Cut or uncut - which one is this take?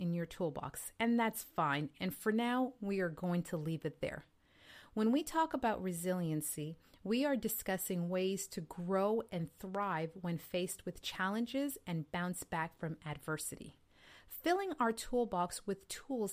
uncut